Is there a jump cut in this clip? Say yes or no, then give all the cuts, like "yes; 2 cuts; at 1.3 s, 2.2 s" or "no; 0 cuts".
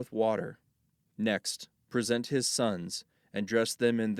yes; 1 cut; at 1.0 s